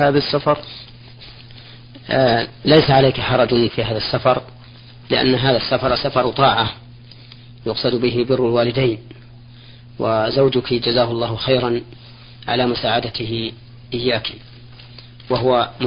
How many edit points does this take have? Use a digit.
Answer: 0